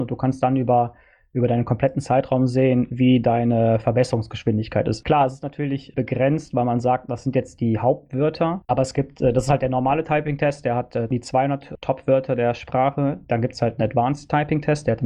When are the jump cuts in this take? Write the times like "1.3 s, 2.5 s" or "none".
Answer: none